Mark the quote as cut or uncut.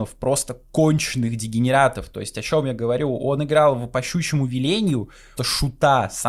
cut